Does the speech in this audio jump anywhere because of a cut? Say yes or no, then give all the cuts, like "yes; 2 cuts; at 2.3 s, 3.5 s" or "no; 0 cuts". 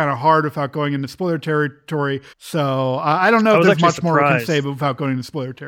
yes; 1 cut; at 2.3 s